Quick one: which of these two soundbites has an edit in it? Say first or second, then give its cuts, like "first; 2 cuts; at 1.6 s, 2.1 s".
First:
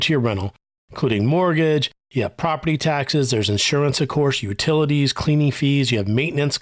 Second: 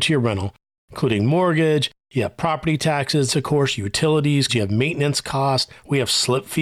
second; 2 cuts; at 3.3 s, 4.5 s